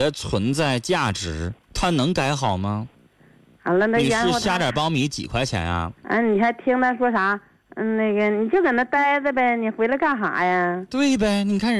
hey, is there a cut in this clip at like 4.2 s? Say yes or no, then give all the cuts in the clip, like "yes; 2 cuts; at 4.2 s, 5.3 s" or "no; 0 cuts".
no; 0 cuts